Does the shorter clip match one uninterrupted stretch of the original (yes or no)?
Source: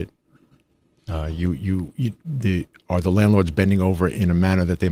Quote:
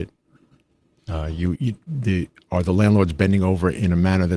no